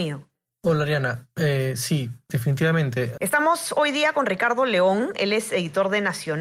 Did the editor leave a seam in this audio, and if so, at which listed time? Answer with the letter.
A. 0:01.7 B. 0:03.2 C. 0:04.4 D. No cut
B